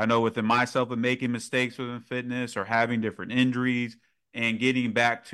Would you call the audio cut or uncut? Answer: uncut